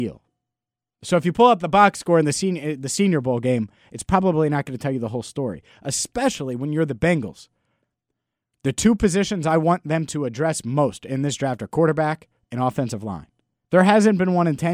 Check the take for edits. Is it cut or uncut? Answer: cut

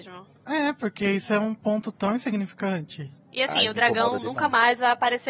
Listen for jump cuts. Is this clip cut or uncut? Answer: cut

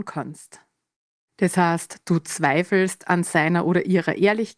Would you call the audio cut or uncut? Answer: cut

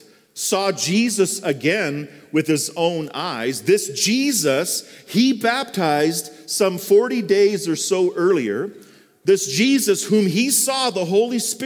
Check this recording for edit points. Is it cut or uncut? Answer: uncut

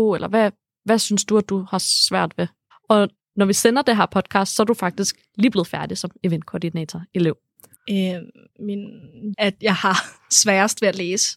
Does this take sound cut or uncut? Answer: cut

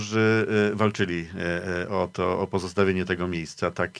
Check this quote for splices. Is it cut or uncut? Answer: uncut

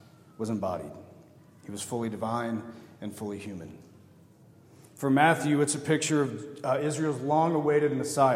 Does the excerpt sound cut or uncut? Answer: uncut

